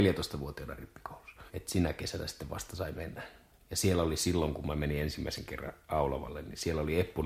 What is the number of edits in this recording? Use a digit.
1